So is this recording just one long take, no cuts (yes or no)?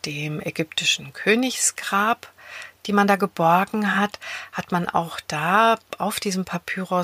yes